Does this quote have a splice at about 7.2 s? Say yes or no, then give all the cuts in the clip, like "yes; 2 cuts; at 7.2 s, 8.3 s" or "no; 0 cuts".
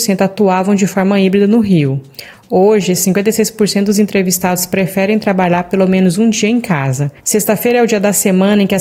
yes; 1 cut; at 7.2 s